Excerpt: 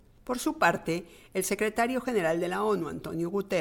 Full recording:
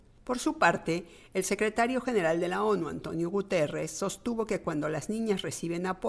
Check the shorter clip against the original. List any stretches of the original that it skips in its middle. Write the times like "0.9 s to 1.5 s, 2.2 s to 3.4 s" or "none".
none